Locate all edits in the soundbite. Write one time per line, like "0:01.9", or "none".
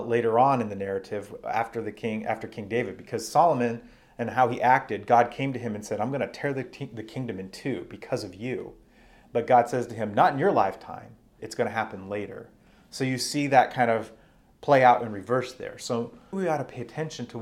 0:11.4
0:16.3